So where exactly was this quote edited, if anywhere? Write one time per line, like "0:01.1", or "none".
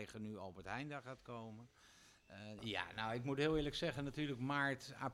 0:02.6